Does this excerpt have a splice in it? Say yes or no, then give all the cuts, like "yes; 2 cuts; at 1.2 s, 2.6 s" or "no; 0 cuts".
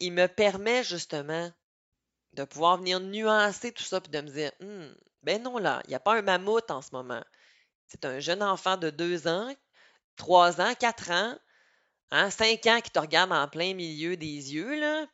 no; 0 cuts